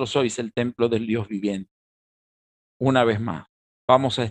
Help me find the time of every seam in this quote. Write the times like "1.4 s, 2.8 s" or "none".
2.6 s